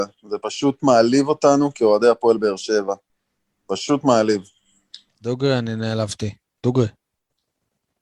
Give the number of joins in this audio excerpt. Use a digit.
0